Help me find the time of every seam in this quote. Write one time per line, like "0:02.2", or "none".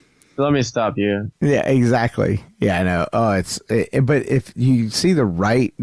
0:01.3